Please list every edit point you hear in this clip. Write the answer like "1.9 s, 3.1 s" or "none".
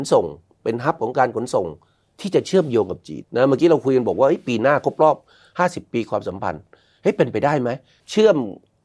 3.2 s